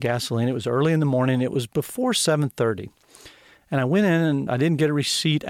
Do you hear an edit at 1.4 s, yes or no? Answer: no